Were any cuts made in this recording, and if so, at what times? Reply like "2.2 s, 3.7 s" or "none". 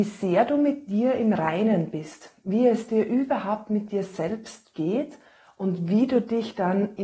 none